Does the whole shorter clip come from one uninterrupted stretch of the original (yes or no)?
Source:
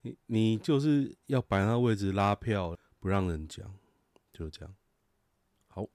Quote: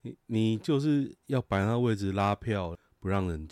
yes